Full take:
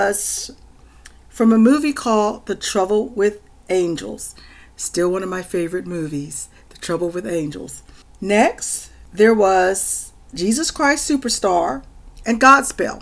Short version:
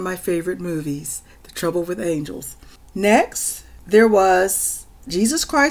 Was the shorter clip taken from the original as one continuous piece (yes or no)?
yes